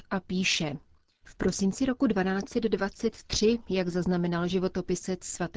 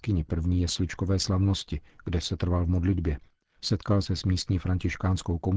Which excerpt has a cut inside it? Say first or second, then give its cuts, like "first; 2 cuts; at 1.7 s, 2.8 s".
first; 1 cut; at 1.2 s